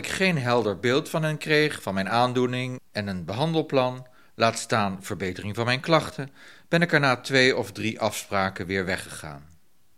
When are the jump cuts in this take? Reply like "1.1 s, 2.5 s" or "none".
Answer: none